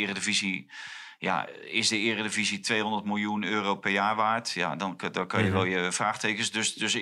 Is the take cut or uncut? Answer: uncut